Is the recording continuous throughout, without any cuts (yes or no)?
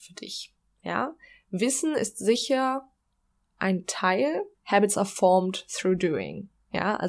no